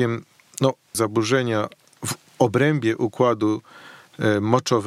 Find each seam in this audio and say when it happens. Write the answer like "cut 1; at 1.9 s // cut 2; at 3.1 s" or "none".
cut 1; at 0.9 s